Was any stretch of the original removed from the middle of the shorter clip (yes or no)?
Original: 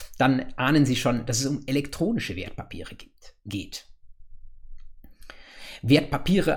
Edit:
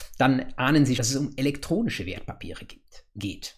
yes